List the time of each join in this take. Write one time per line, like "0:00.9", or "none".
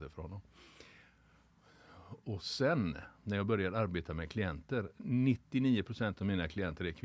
none